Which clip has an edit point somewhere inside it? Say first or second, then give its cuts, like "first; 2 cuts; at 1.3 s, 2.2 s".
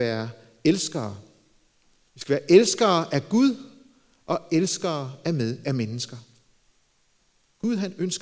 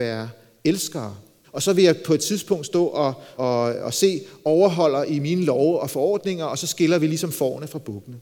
second; 2 cuts; at 1.4 s, 3.4 s